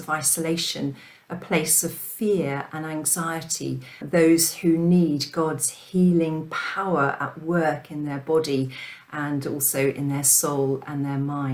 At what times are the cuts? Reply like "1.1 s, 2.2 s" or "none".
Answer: 4.0 s